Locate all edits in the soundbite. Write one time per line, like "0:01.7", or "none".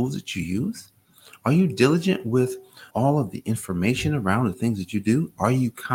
0:02.9

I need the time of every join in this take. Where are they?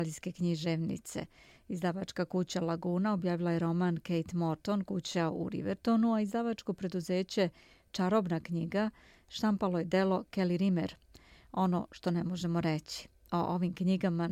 none

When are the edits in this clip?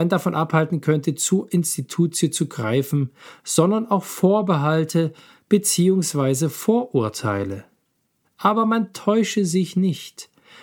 0:08.2

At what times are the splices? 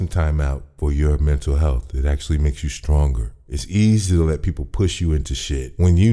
none

